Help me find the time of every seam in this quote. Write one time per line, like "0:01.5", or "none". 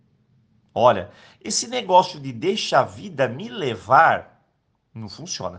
none